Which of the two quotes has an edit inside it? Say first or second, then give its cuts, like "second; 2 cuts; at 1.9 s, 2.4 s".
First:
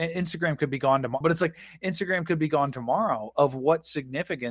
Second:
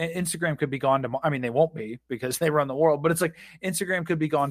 first; 1 cut; at 1.2 s